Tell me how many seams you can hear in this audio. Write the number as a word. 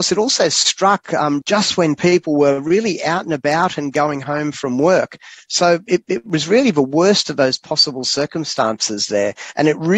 one